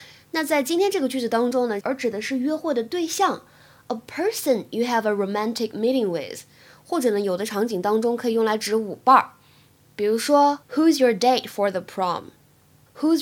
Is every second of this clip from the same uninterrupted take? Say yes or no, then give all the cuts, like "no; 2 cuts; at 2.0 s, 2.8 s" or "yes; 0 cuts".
no; 1 cut; at 1.8 s